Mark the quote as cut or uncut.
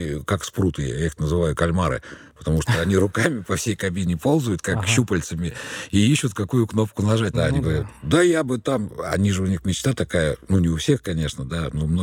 cut